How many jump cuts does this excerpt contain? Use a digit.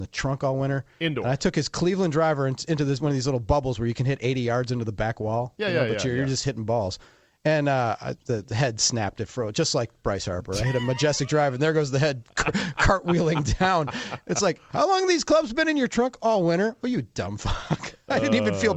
0